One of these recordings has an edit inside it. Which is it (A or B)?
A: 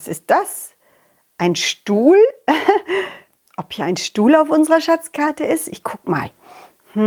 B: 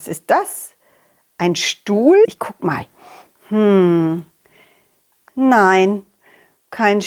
B